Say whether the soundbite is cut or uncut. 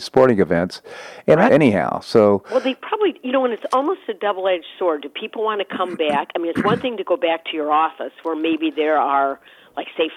cut